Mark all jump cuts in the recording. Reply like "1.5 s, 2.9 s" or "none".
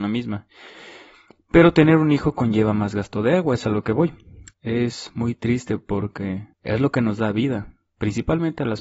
4.5 s, 6.5 s